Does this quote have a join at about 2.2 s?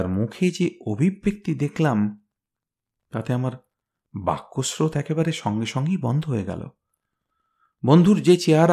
no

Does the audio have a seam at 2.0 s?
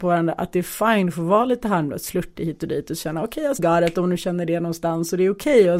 no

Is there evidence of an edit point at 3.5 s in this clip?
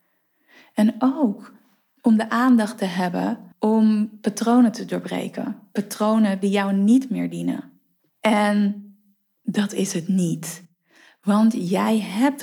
yes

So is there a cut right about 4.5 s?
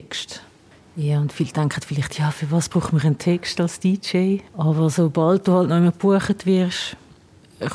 yes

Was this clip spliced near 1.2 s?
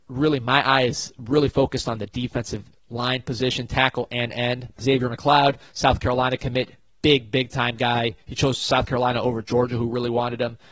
no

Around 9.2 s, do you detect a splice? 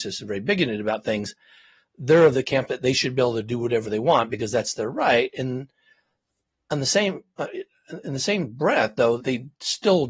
yes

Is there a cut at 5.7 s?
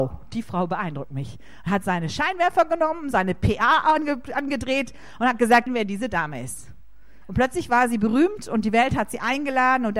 yes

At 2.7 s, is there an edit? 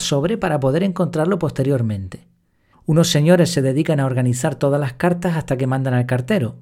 yes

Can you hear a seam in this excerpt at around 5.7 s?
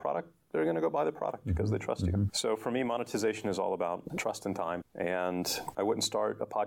yes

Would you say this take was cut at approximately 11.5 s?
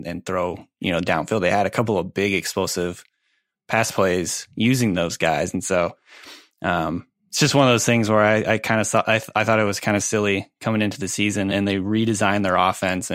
yes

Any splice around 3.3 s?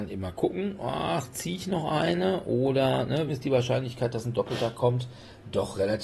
yes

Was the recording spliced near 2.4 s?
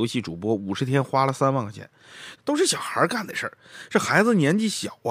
yes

